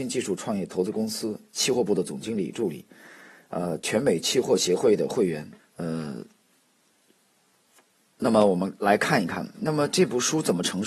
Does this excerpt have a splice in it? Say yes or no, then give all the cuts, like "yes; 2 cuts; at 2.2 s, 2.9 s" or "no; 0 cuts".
yes; 1 cut; at 5.6 s